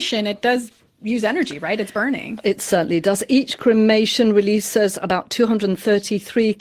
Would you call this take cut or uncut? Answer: uncut